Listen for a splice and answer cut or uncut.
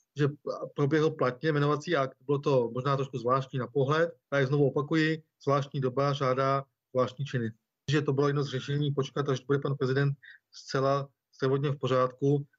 cut